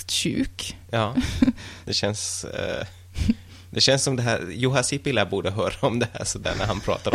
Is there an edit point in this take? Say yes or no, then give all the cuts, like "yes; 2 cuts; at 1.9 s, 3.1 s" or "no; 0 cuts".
yes; 1 cut; at 1.8 s